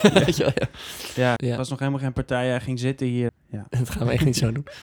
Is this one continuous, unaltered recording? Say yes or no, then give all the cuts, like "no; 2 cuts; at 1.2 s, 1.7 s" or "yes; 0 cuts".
no; 2 cuts; at 1.4 s, 3.3 s